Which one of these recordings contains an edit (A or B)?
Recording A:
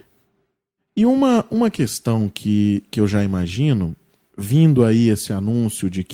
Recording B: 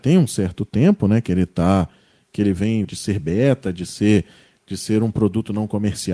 B